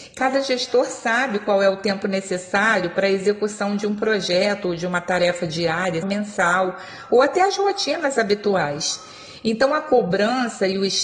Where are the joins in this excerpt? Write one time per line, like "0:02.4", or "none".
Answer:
0:06.0